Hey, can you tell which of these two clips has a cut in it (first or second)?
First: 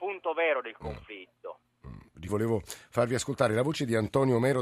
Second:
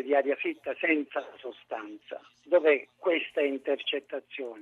first